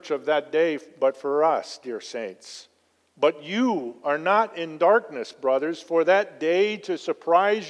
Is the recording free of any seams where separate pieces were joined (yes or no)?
yes